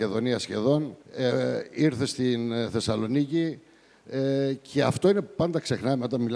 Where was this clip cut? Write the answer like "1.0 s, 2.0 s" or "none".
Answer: 1.0 s